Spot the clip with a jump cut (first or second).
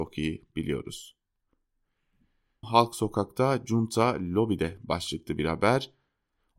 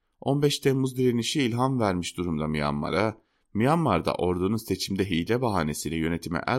first